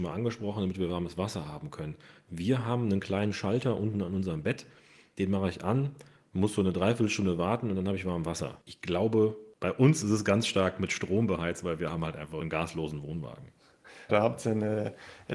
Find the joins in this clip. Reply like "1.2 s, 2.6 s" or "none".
14.1 s

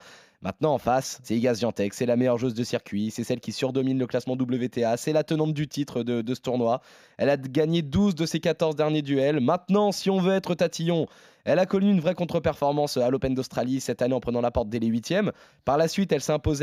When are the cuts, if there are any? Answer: 1.2 s

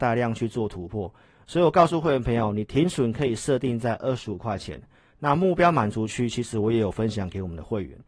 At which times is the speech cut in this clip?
none

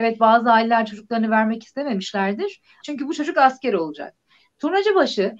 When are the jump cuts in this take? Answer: 2.8 s

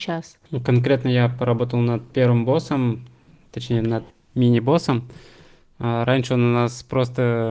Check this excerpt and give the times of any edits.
none

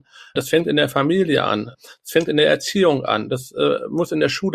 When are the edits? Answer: none

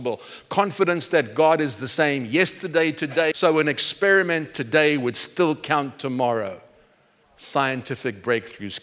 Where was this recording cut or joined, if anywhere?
3.3 s

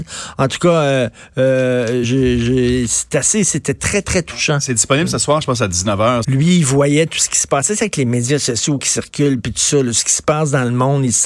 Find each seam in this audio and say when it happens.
2.0 s, 6.2 s

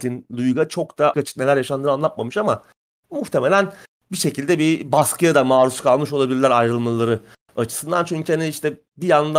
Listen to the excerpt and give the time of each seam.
1.1 s

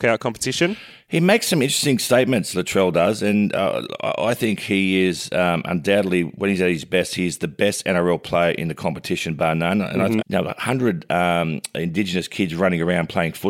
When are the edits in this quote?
10.2 s

